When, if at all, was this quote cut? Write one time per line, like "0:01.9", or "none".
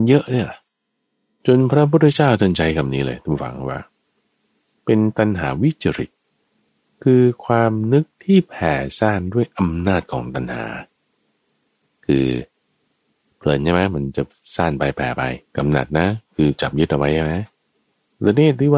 0:15.5